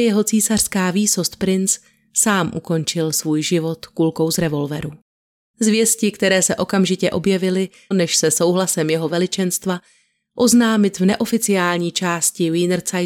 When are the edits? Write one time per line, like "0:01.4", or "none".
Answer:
0:05.4
0:07.9